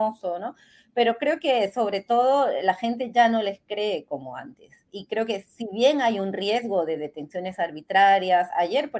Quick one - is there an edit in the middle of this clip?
no; 0 cuts

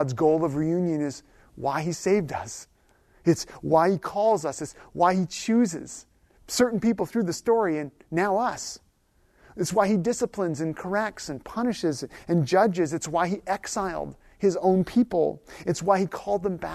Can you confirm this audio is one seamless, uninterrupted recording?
yes; 0 cuts

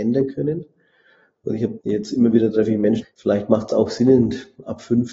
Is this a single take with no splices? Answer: no; 2 cuts; at 1.8 s, 3.0 s

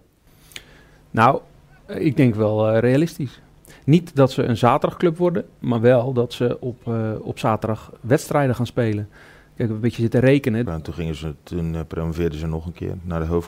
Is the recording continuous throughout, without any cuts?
no; 1 cut; at 10.7 s

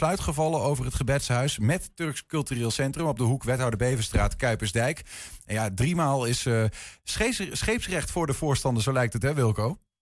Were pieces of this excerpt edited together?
no; 0 cuts

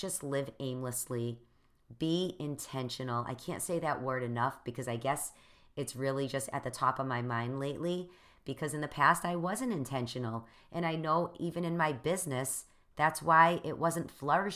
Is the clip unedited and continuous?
yes; 0 cuts

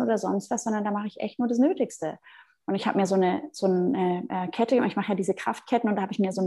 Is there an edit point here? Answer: no; 0 cuts

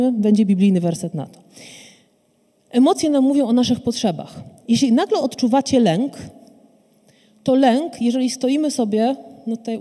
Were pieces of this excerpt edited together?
no; 0 cuts

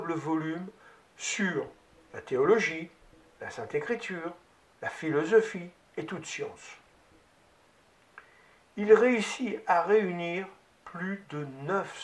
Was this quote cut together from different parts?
no; 0 cuts

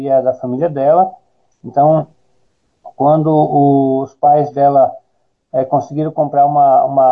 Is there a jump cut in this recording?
no; 0 cuts

